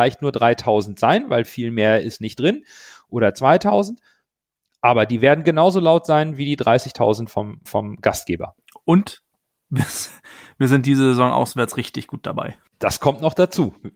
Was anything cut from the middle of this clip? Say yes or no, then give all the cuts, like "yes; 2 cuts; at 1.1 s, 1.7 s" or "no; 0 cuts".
yes; 2 cuts; at 7.7 s, 12.7 s